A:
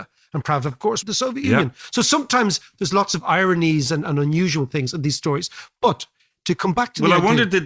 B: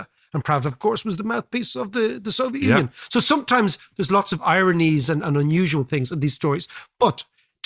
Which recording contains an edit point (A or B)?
A